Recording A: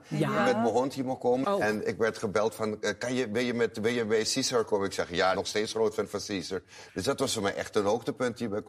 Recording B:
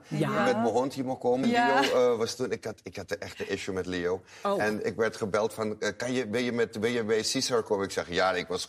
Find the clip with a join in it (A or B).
A